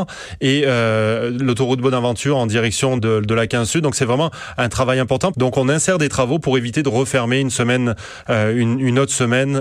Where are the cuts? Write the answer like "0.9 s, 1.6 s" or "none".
3.0 s, 5.3 s